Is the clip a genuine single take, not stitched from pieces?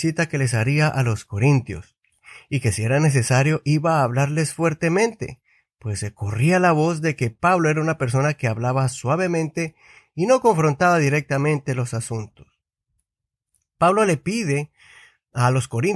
yes; 0 cuts

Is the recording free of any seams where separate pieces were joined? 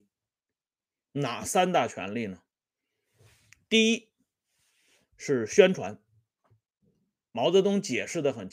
yes; 0 cuts

